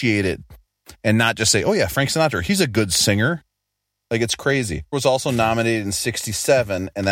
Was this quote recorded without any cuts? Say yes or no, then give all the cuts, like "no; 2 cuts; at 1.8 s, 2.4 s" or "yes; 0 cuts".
no; 1 cut; at 4.9 s